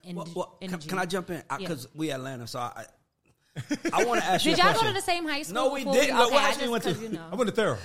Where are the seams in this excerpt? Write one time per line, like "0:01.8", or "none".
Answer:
none